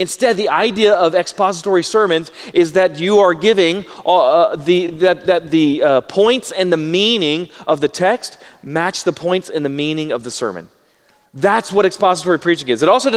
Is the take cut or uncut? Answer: uncut